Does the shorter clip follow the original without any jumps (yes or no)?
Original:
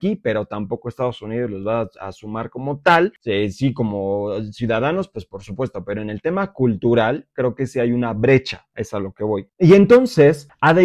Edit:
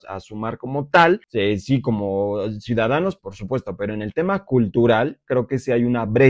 no